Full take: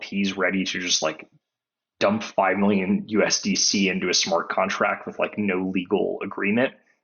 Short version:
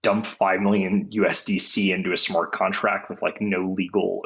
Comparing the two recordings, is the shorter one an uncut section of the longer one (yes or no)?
yes